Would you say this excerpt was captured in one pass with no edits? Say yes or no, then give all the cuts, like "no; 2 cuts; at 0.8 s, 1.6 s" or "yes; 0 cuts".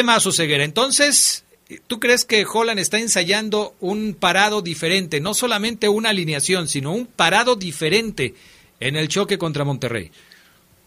yes; 0 cuts